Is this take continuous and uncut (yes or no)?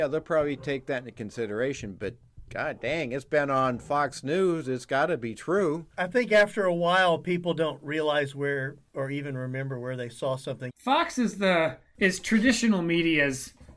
no